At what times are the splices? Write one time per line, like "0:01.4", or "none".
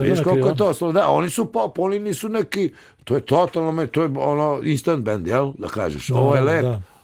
none